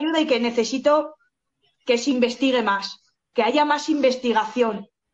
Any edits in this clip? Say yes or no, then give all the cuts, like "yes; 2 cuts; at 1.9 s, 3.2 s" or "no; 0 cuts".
no; 0 cuts